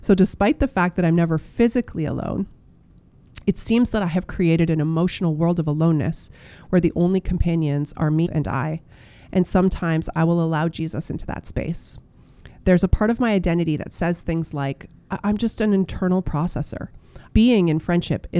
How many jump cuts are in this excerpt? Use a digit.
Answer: 2